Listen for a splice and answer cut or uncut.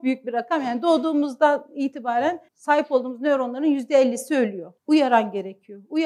cut